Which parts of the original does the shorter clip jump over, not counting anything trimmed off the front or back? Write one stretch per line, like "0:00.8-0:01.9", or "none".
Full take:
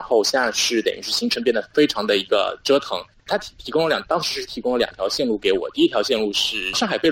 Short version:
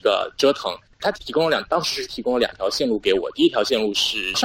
0:03.4-0:03.5

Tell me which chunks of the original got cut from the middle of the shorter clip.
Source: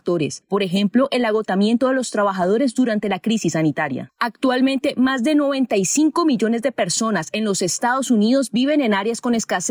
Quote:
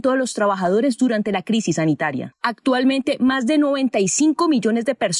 none

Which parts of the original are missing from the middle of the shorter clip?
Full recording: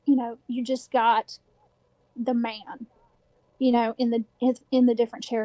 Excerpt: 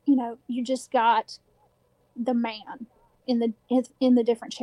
0:03.2-0:04.0

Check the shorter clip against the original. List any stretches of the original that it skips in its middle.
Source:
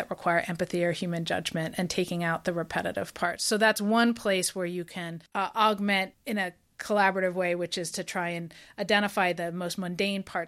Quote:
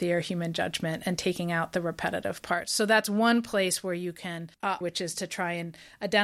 0:05.5-0:07.6

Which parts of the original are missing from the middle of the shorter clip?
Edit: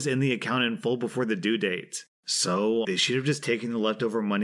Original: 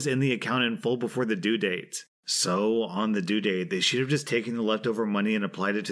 0:02.8-0:03.7

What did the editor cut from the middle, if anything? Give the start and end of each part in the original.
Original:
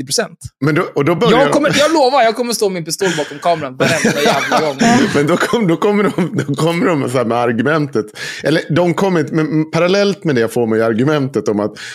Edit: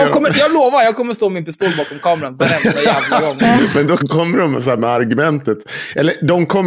0:05.4-0:06.5

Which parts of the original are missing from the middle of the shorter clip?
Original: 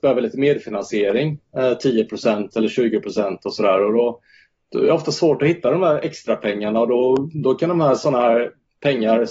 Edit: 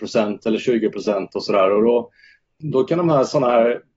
0:04.7-0:07.3

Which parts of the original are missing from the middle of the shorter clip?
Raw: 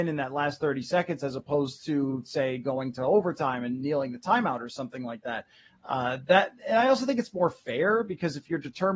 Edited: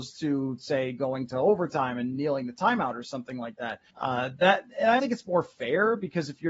0:05.5-0:05.8
0:06.9-0:07.1

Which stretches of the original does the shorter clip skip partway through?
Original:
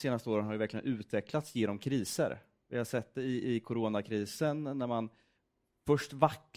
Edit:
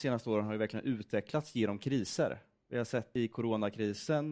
0:03.2-0:03.5

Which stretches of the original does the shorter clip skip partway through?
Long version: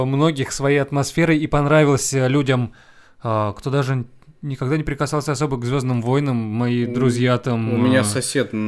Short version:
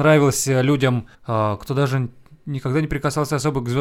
0:02.8-0:03.1

